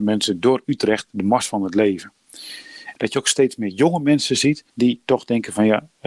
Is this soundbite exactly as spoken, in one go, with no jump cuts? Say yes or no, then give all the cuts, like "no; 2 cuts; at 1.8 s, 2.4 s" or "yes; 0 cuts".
no; 2 cuts; at 3.0 s, 4.7 s